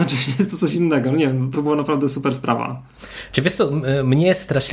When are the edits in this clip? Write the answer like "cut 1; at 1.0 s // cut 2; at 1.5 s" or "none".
cut 1; at 1.5 s